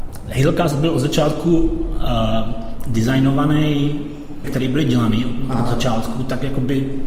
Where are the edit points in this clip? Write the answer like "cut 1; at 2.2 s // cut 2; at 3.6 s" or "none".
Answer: cut 1; at 4.4 s